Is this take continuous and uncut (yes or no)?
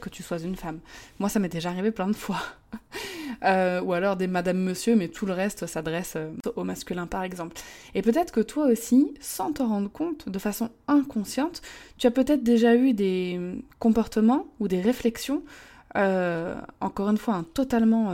yes